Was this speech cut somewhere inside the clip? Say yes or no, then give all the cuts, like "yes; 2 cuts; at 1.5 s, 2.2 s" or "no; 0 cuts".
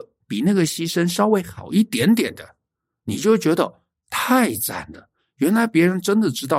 no; 0 cuts